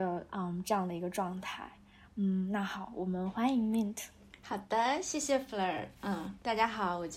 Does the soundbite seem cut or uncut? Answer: uncut